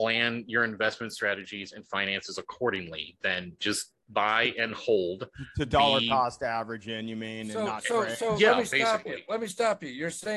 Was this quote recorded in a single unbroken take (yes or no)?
yes